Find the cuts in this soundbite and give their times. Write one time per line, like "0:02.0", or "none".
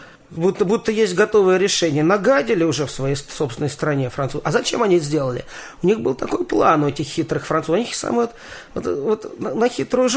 none